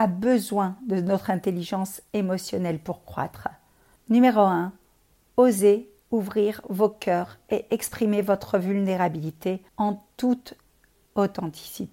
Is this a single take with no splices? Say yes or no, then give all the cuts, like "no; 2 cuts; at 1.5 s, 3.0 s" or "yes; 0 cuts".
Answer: no; 2 cuts; at 4.0 s, 9.7 s